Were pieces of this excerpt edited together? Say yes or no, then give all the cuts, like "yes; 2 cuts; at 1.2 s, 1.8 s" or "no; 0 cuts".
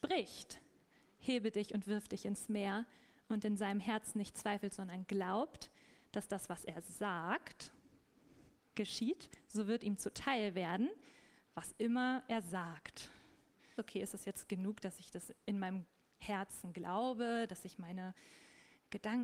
yes; 1 cut; at 13.8 s